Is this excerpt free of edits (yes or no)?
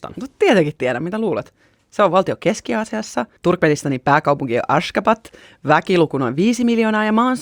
yes